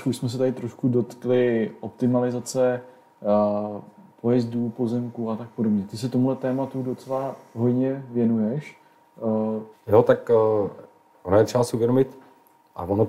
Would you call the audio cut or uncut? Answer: cut